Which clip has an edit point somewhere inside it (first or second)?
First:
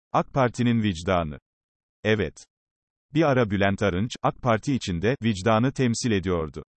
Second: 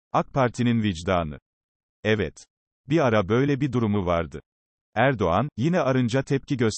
second